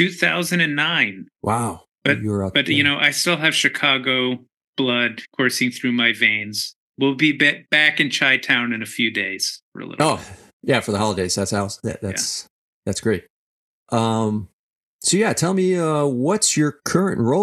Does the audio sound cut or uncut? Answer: uncut